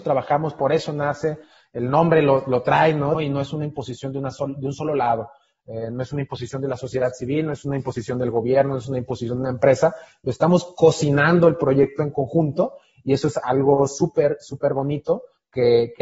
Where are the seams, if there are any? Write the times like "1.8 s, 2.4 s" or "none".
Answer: 3.1 s